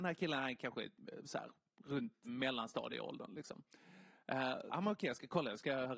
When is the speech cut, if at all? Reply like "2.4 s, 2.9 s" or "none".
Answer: 2.2 s, 4.7 s